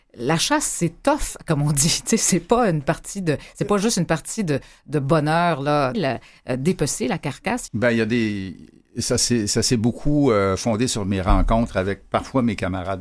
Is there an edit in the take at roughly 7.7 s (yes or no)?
yes